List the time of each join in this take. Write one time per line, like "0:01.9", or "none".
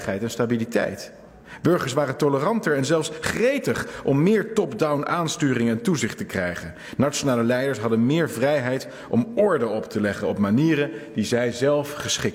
none